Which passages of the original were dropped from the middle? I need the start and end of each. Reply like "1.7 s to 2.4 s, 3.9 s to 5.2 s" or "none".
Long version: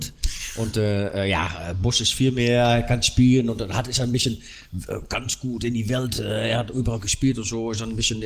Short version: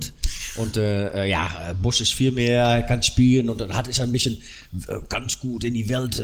none